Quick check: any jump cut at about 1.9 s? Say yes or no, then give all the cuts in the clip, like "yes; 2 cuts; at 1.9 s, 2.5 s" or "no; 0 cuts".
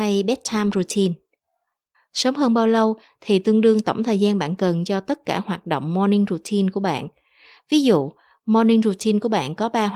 yes; 1 cut; at 1.9 s